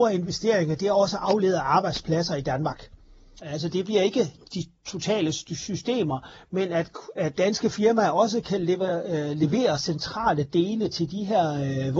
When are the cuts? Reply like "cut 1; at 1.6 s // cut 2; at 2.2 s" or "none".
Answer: cut 1; at 3.4 s